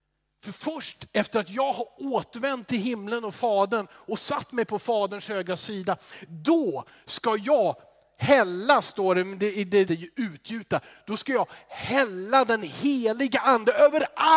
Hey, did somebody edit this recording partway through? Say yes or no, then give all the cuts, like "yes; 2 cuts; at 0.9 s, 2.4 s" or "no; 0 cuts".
yes; 1 cut; at 9.9 s